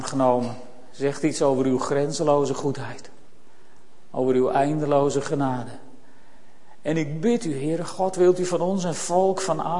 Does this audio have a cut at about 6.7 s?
no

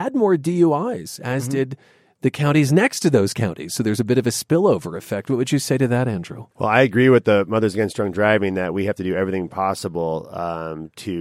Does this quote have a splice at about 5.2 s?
no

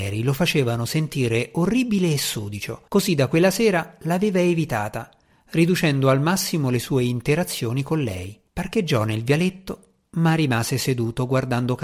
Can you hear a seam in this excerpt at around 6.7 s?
no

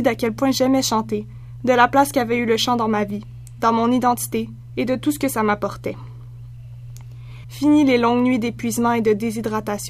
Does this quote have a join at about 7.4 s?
yes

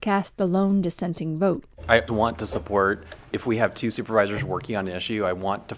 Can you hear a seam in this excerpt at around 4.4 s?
no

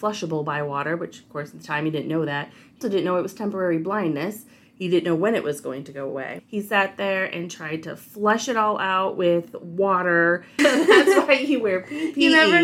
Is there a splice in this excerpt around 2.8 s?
yes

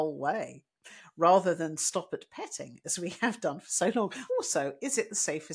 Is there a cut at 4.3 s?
yes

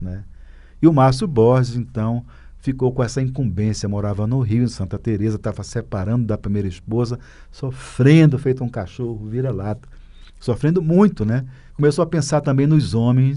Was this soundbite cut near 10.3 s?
yes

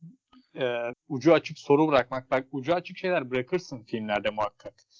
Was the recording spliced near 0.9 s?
yes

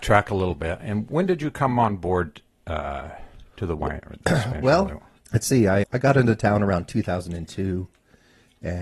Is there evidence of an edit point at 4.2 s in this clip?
no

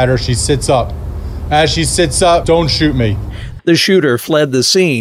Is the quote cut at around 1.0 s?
no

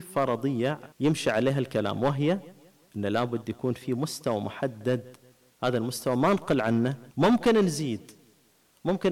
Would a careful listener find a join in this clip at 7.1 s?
yes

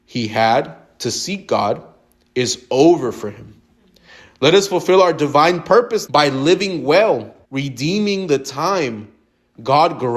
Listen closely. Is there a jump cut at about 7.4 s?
yes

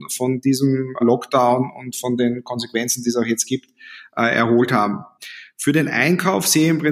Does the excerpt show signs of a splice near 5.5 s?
no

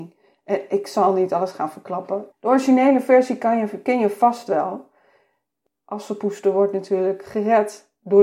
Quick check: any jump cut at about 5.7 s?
no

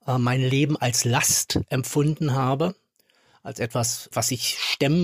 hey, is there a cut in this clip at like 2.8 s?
no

